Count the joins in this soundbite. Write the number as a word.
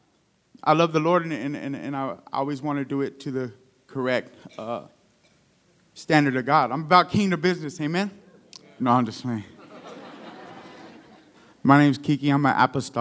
one